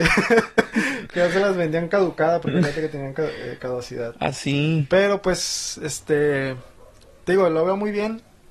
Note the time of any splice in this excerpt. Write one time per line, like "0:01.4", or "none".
none